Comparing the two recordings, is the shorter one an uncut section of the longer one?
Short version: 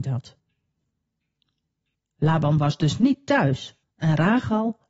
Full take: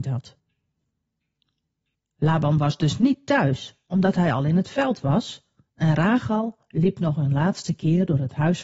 no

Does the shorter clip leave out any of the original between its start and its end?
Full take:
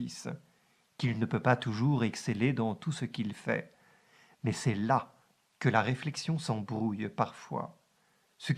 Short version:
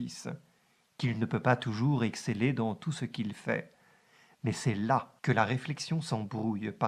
yes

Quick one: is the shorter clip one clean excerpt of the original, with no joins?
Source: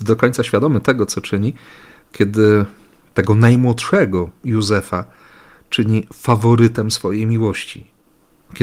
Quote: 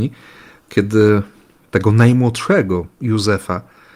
yes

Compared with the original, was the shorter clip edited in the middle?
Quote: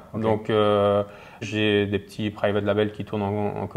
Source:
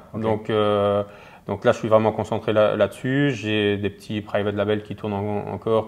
yes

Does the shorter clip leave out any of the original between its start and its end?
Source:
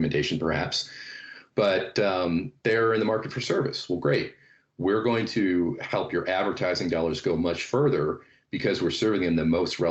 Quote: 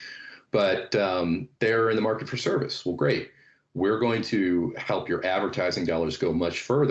no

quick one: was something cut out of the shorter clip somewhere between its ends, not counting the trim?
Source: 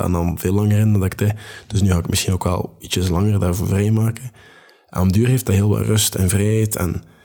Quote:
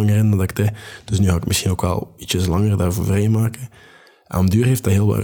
no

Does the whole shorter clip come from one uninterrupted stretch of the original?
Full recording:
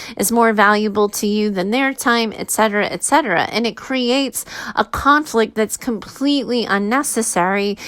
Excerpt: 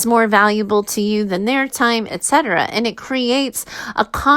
no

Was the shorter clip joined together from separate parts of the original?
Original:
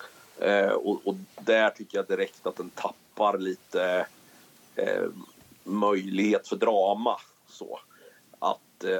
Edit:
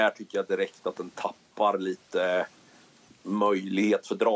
yes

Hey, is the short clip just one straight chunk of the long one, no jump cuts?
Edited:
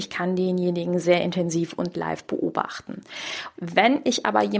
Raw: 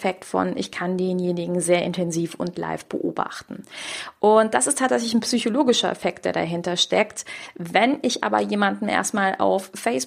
no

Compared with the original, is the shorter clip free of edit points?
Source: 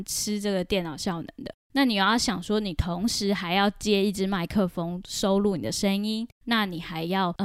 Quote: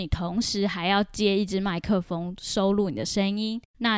yes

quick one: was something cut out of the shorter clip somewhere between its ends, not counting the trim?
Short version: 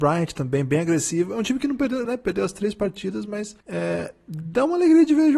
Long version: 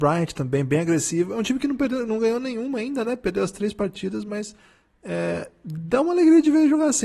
yes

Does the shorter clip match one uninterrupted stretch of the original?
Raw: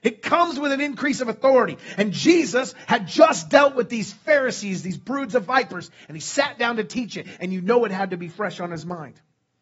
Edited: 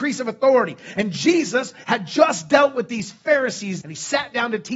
no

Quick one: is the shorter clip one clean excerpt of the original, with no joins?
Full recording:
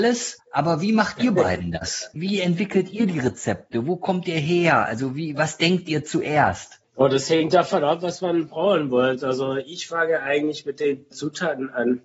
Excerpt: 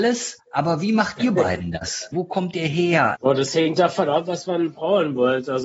no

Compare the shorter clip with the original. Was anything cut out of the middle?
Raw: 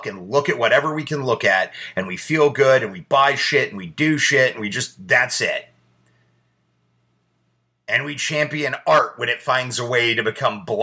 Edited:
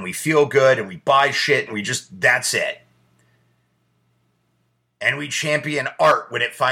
yes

